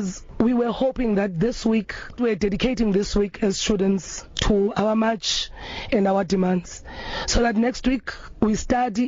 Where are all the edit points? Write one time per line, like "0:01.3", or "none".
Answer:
0:02.2